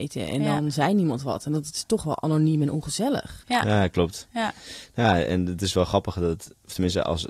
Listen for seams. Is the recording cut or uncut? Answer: uncut